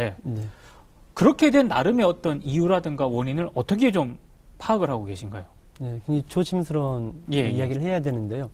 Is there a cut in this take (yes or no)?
no